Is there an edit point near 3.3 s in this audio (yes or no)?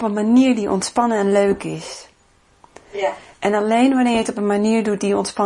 no